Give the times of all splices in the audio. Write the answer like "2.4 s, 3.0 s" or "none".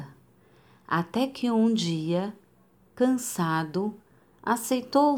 none